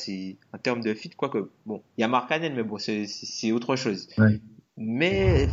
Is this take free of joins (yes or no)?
yes